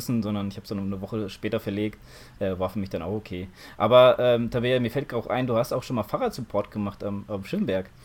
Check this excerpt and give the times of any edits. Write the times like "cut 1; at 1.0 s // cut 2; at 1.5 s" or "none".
none